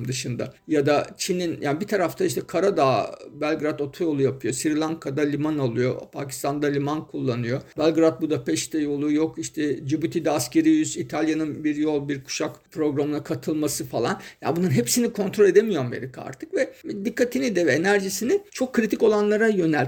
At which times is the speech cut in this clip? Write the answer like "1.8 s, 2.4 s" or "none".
none